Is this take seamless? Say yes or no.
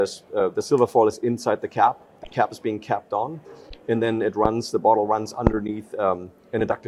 yes